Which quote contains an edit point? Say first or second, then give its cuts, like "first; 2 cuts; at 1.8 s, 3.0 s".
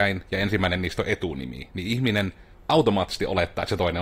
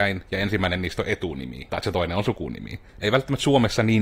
second; 2 cuts; at 1.7 s, 2.9 s